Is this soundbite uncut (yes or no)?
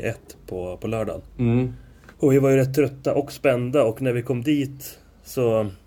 no